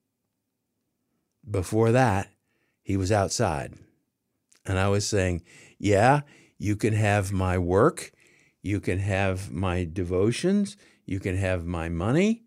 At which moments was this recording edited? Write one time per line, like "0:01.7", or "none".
none